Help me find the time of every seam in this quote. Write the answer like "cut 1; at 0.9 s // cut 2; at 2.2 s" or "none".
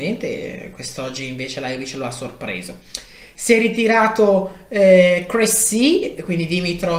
none